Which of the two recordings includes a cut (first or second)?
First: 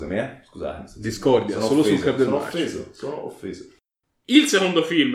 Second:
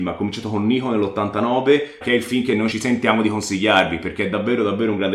second